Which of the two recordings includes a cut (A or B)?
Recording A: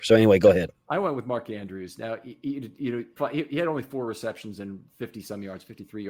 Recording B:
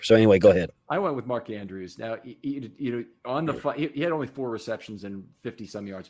A